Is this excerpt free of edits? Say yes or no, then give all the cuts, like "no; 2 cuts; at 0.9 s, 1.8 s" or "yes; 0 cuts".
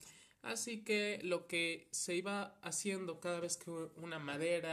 yes; 0 cuts